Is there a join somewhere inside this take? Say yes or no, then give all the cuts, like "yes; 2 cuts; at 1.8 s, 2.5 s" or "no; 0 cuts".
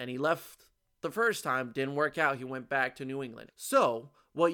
yes; 1 cut; at 3.5 s